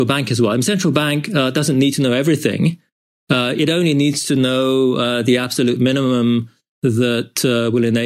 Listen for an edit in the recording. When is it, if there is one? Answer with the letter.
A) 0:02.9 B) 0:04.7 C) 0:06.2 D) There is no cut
D